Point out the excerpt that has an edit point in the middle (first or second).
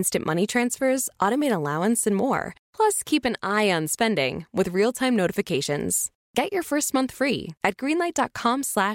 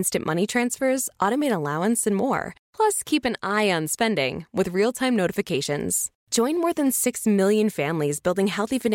first